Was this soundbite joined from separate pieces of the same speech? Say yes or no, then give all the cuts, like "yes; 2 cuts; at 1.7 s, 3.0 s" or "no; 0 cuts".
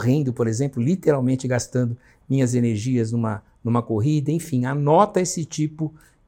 no; 0 cuts